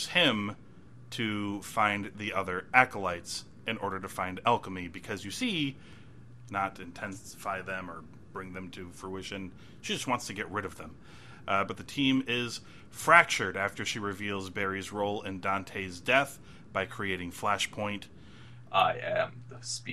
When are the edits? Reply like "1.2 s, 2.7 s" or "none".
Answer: 6.5 s, 11.7 s, 18.6 s